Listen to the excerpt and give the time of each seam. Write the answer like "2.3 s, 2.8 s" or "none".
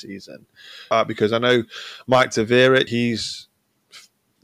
0.9 s, 2.9 s